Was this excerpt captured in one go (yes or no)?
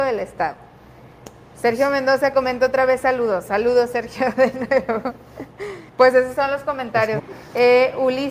no